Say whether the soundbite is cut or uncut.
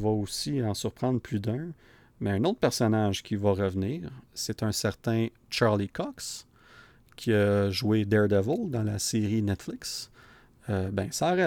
cut